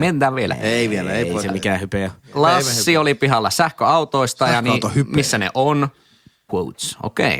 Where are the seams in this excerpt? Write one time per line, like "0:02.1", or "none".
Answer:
0:06.5